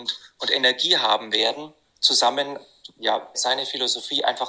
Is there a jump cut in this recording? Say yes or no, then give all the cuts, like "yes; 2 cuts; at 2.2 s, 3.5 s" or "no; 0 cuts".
yes; 2 cuts; at 1.8 s, 3.3 s